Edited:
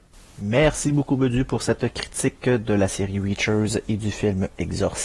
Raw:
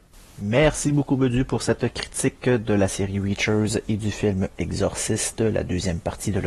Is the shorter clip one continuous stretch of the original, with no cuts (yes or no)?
yes